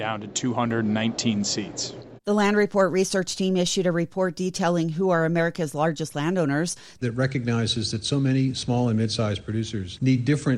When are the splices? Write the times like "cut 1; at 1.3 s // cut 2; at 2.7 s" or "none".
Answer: cut 1; at 2.2 s // cut 2; at 7.0 s